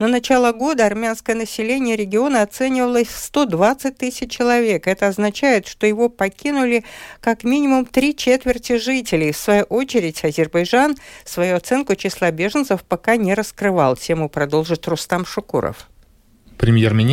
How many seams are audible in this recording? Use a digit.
0